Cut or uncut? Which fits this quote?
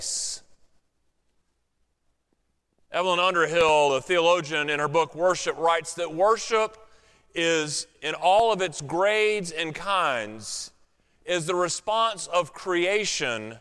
uncut